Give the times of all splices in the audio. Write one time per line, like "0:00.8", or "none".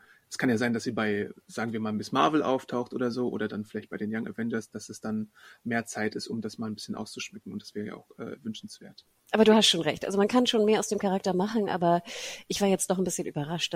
none